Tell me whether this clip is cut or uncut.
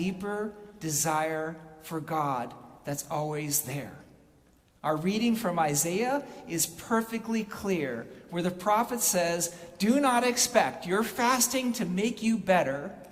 uncut